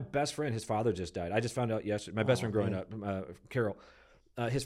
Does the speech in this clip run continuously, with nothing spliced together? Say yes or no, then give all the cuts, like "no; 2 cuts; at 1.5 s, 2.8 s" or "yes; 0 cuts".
yes; 0 cuts